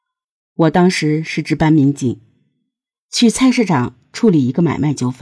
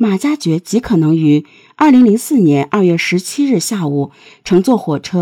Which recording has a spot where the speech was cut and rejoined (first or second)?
first